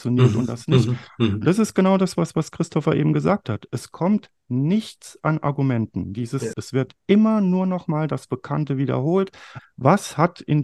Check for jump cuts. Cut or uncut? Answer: cut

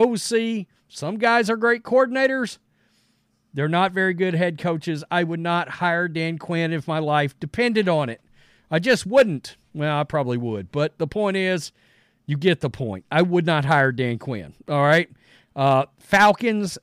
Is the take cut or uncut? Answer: uncut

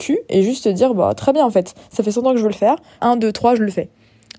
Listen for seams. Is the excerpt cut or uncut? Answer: cut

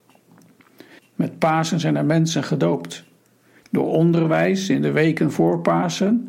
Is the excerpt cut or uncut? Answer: cut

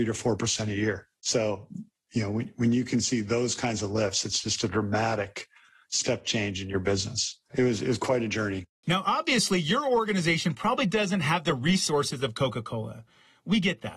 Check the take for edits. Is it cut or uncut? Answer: uncut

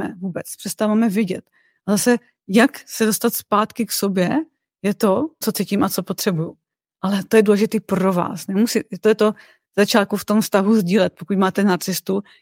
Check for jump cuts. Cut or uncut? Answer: cut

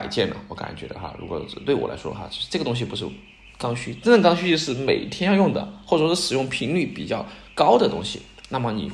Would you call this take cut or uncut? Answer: uncut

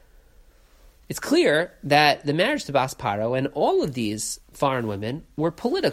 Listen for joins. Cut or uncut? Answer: uncut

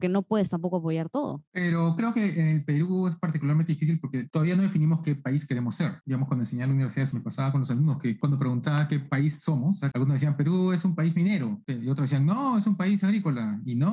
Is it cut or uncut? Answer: cut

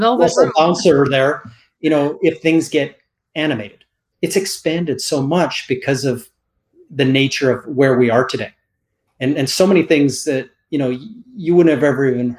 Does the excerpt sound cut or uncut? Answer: cut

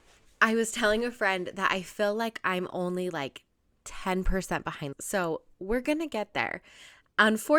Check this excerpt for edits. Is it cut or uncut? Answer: cut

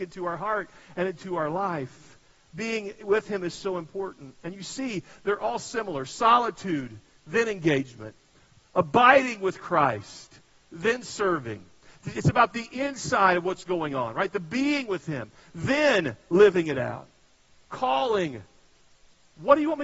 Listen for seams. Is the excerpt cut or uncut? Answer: uncut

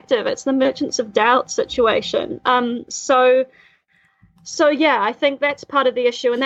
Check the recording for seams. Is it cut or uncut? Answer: uncut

